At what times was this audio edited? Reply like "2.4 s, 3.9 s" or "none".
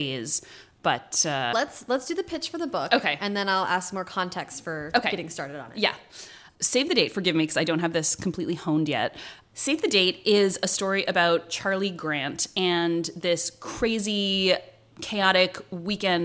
1.5 s